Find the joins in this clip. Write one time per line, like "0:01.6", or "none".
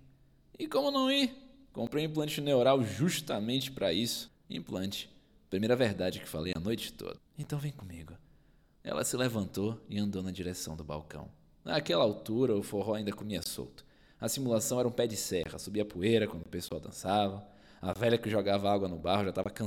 0:04.3
0:07.2